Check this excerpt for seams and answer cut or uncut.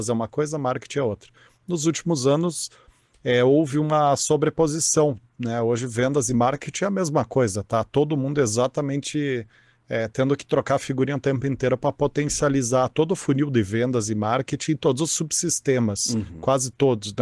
uncut